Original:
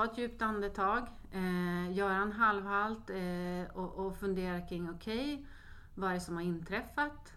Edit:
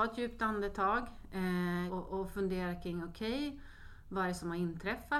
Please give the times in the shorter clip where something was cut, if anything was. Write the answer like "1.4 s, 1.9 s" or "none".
1.9 s